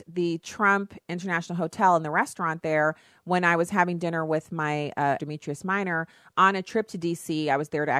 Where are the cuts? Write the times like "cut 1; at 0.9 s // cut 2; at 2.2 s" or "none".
cut 1; at 5.2 s